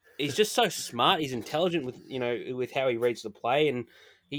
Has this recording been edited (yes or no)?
no